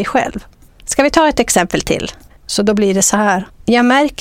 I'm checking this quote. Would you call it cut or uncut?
cut